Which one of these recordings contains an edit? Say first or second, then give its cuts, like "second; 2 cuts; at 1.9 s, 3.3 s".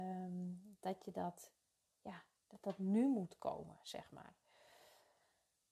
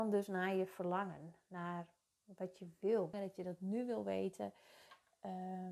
second; 1 cut; at 3.1 s